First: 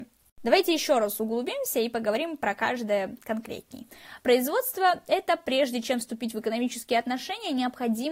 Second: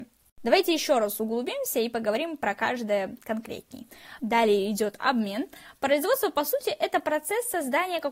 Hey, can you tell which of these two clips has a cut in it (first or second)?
second